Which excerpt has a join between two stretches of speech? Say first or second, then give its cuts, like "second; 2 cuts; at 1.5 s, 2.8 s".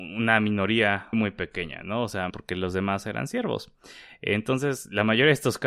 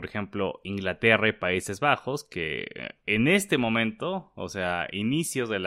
first; 2 cuts; at 1.1 s, 2.3 s